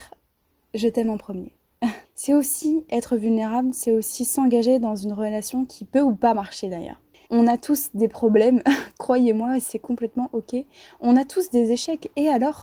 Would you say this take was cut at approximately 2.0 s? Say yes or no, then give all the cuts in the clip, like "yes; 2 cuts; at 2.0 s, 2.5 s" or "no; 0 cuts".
yes; 2 cuts; at 2.0 s, 7.3 s